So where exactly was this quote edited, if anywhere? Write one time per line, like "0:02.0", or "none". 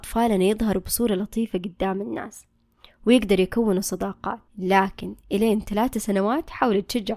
0:04.5